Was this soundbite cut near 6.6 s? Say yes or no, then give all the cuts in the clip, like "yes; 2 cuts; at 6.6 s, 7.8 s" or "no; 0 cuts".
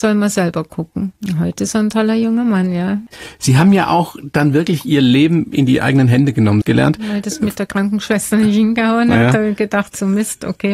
yes; 1 cut; at 6.6 s